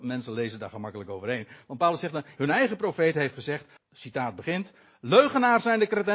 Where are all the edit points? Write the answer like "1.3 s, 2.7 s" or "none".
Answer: 2.4 s, 3.8 s